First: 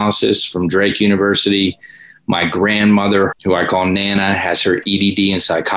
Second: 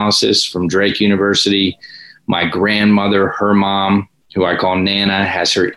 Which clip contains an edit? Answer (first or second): first